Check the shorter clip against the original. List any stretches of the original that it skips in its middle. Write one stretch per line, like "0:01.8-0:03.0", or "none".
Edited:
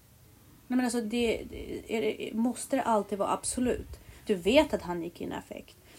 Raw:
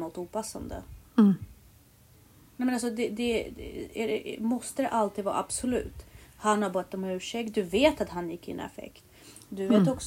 0:02.9-0:03.1
0:06.3-0:07.5